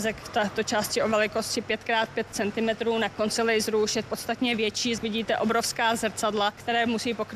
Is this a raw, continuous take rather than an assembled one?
yes; 0 cuts

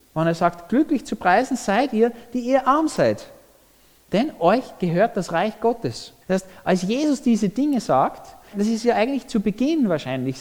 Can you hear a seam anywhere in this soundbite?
yes; 2 cuts; at 6.2 s, 8.5 s

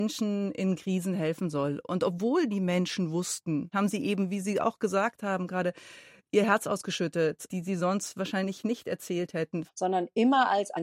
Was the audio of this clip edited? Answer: yes; 3 cuts; at 3.7 s, 7.5 s, 9.7 s

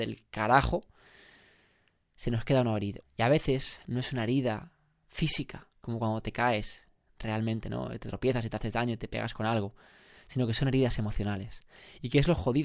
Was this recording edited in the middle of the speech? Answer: yes; 1 cut; at 3.0 s

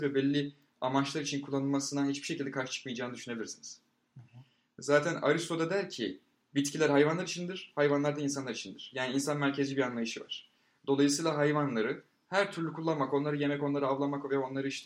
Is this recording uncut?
yes; 0 cuts

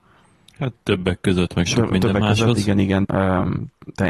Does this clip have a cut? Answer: yes; 1 cut; at 3.0 s

